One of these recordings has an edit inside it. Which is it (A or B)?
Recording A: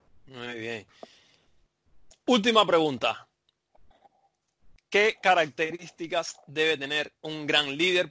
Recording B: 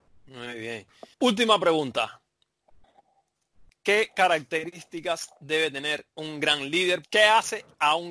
B